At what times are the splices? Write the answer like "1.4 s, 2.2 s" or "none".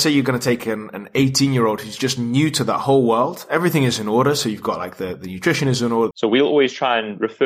6.1 s